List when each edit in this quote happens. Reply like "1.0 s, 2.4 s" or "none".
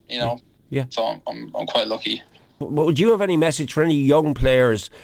0.9 s